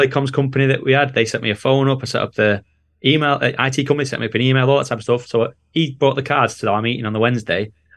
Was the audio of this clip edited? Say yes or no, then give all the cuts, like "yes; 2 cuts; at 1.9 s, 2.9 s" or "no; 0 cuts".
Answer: no; 0 cuts